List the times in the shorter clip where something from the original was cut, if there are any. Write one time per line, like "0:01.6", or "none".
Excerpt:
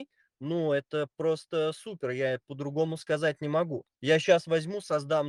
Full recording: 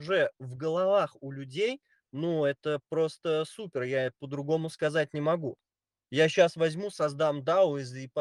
0:03.9